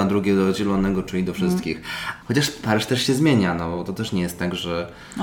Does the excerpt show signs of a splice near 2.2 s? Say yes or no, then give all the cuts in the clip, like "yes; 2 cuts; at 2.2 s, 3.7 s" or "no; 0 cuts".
yes; 1 cut; at 2.2 s